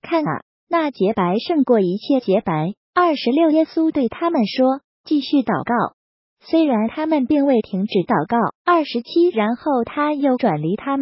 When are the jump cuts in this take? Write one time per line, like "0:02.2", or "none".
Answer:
0:02.8
0:08.6